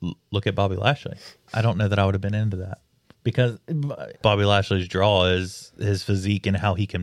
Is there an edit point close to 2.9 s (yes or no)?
no